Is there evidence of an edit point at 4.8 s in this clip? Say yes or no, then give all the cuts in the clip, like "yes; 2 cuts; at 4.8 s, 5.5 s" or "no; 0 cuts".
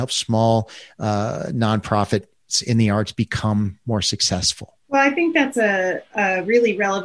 yes; 1 cut; at 4.8 s